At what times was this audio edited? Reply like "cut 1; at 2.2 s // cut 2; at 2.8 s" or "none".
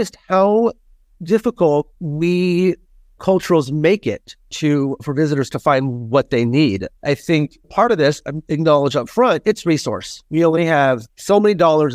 none